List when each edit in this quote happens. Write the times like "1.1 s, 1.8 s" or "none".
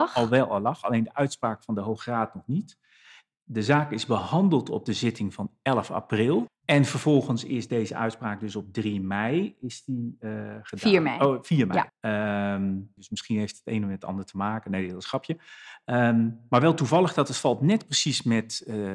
6.5 s, 11.9 s, 13.0 s